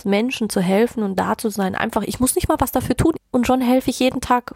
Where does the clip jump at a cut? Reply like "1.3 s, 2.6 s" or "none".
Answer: 3.2 s